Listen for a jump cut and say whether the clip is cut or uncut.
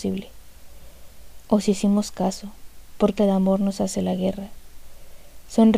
cut